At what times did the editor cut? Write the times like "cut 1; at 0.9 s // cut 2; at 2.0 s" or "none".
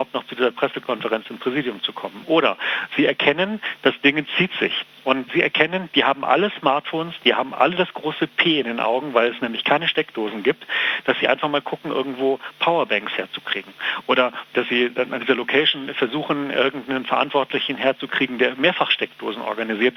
none